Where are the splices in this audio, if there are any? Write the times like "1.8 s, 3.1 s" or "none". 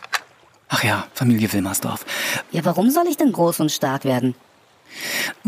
1.1 s, 2.4 s